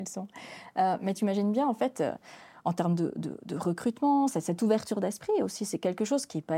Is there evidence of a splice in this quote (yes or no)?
no